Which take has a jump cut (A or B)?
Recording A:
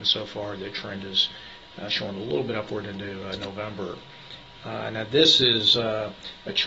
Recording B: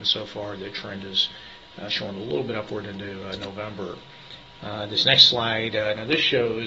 B